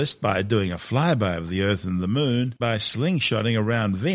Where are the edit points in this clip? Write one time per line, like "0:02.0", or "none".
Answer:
0:02.6